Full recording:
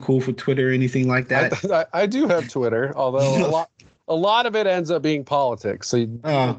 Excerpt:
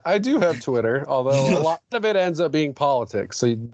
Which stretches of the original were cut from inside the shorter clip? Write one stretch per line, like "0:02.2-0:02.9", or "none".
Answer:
0:03.8-0:04.4